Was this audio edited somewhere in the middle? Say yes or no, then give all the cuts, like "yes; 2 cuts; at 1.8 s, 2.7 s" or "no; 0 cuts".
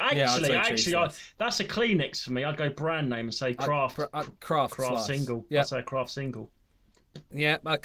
no; 0 cuts